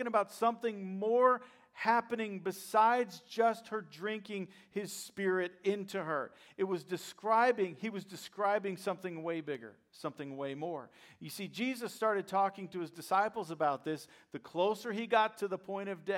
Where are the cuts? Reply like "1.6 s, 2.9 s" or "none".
none